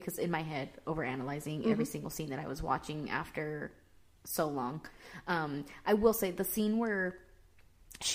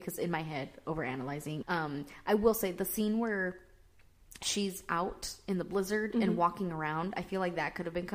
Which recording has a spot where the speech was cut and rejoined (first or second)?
second